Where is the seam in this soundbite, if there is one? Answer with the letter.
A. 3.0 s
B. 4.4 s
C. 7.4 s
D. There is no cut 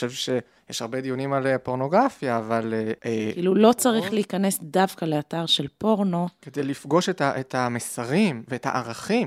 A